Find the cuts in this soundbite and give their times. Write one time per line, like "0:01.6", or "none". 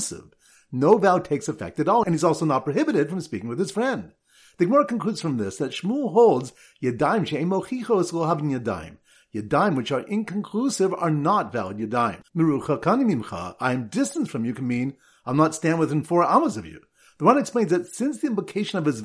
0:12.2

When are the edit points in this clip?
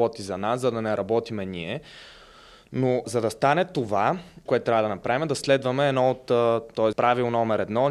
0:03.0
0:04.5
0:06.9

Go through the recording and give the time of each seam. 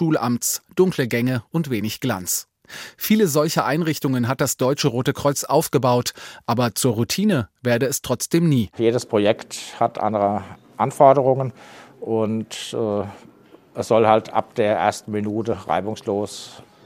none

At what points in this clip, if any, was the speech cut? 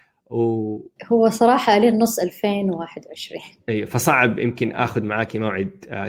0:01.0

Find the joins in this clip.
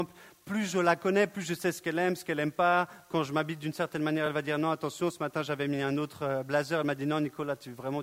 none

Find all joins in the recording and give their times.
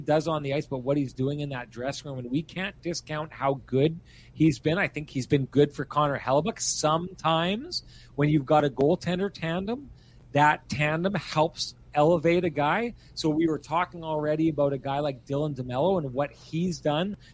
none

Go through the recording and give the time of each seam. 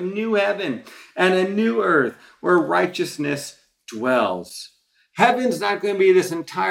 none

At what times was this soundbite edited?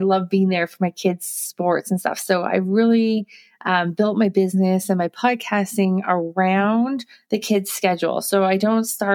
none

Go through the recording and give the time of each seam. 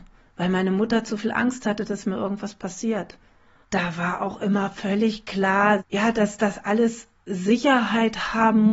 0:03.6
0:05.8

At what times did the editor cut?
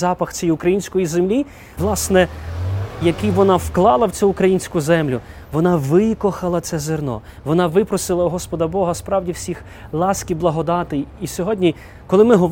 0:01.8
0:03.0

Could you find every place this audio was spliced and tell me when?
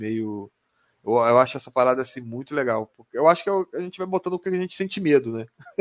none

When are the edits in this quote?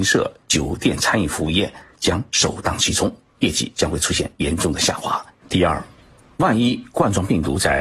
0:05.4

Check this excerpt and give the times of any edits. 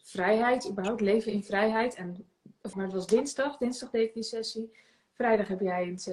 0:02.7

